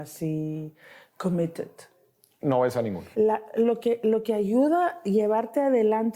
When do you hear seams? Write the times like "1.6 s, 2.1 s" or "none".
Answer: 3.1 s